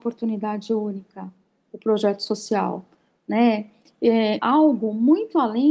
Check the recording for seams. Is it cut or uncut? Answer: cut